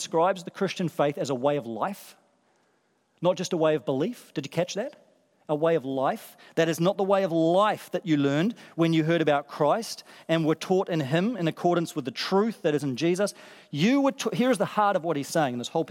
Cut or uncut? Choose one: uncut